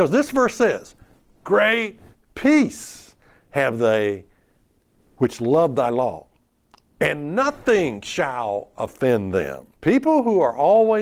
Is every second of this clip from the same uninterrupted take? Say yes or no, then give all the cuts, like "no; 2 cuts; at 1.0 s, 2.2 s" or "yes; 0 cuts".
no; 1 cut; at 9.8 s